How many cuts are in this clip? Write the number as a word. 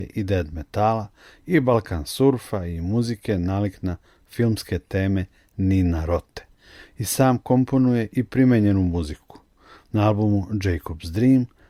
zero